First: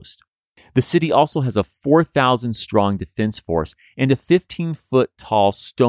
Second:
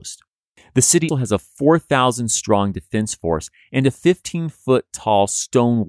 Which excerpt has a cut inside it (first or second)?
second